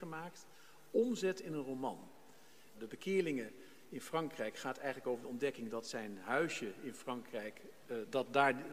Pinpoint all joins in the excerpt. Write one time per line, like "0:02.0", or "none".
0:02.7